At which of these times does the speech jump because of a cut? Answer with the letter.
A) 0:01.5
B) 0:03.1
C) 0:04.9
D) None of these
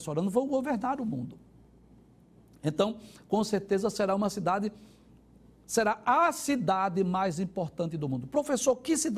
D